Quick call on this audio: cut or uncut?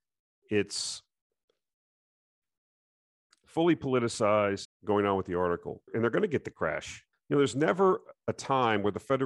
cut